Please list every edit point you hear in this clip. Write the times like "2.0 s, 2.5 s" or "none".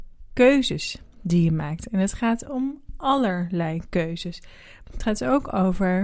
none